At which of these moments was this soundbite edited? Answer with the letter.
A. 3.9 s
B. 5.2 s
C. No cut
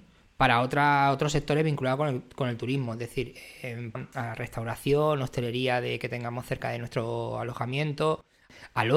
A